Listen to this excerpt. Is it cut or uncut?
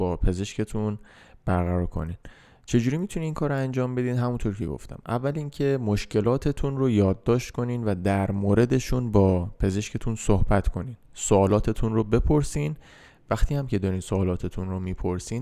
uncut